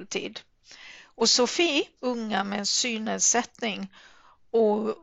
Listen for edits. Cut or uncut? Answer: cut